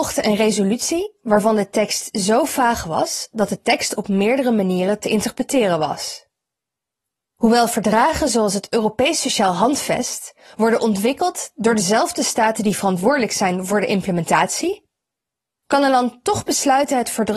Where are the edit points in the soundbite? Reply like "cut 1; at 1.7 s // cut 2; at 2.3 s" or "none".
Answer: cut 1; at 7.3 s

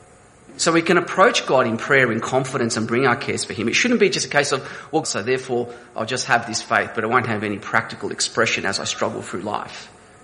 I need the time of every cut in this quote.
cut 1; at 5.0 s

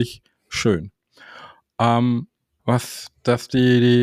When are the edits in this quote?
cut 1; at 2.6 s

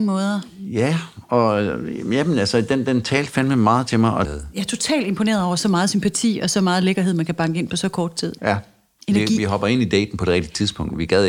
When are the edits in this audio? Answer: cut 1; at 4.2 s // cut 2; at 8.4 s

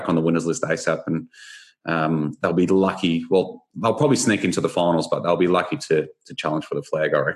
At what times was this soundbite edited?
none

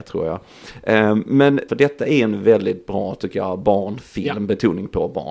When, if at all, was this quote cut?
cut 1; at 1.7 s

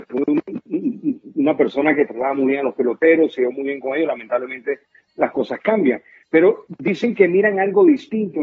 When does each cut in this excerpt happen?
none

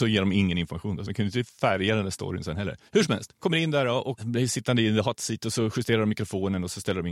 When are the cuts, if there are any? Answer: cut 1; at 1.1 s

